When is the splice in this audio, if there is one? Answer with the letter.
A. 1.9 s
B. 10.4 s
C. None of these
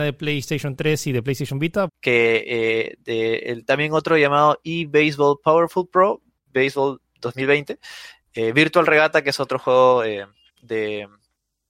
A